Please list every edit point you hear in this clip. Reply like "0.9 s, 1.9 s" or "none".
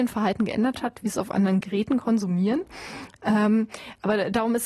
none